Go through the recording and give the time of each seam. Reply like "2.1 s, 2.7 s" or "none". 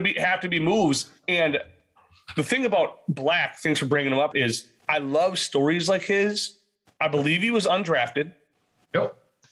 4.3 s